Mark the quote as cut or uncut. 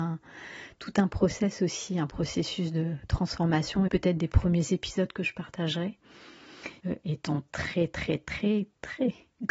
cut